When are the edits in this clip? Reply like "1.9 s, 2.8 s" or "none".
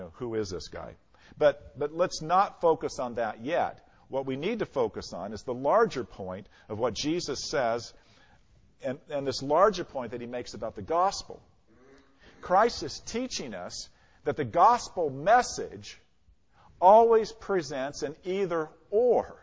none